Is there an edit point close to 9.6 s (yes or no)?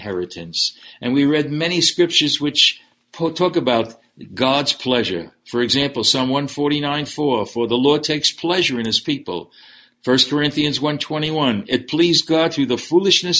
no